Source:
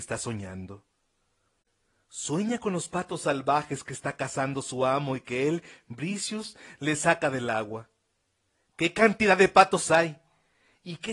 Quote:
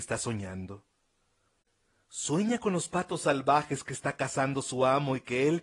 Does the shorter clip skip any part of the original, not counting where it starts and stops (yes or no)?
no